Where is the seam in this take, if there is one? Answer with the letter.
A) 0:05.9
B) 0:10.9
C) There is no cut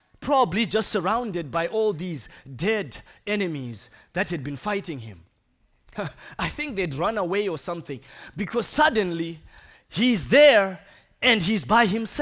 A